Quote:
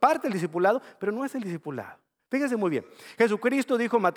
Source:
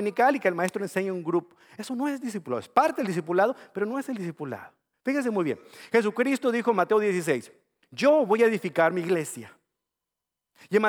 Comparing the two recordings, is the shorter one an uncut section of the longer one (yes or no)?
yes